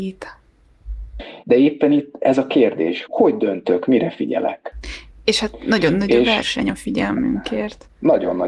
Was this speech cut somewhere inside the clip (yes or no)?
yes